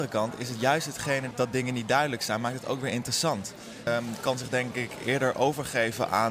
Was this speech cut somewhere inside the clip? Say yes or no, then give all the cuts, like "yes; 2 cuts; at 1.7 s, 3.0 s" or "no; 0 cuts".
yes; 2 cuts; at 1.3 s, 3.9 s